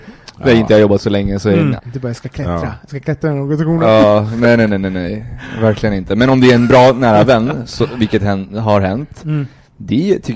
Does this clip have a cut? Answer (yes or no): yes